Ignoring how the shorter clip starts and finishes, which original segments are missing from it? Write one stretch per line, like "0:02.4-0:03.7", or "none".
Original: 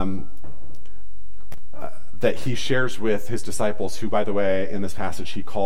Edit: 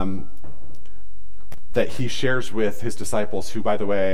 0:01.7-0:02.2